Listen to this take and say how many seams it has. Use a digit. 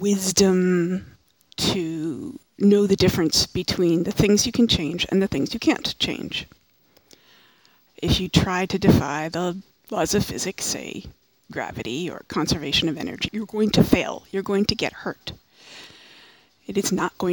2